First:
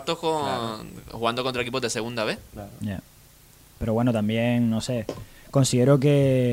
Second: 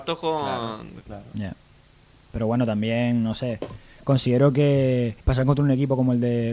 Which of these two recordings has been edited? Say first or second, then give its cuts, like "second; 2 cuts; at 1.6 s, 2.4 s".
second; 2 cuts; at 1.0 s, 5.2 s